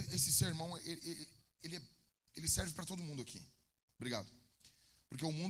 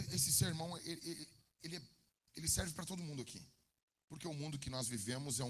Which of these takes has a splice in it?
first; 1 cut; at 3.9 s

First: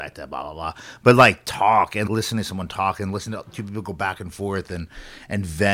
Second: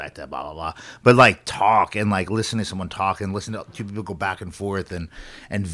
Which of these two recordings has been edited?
first; 1 cut; at 2.0 s

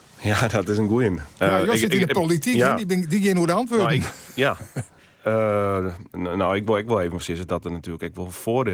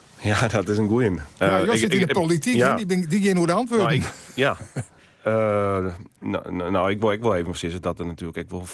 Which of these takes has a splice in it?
first; 1 cut; at 6.1 s

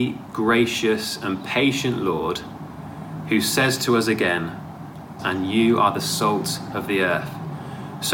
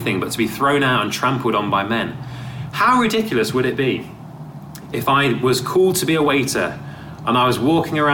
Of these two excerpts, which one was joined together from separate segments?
first; 1 cut; at 5.2 s

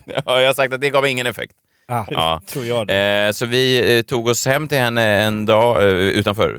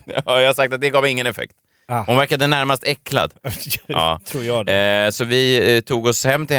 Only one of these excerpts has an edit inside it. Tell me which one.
first; 1 cut; at 2.1 s

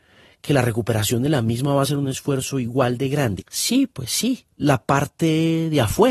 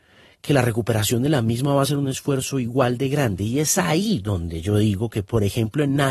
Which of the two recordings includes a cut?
first; 2 cuts; at 3.4 s, 4.6 s

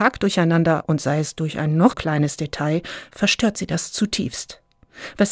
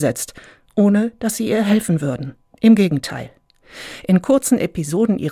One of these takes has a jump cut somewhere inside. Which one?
first; 1 cut; at 1.9 s

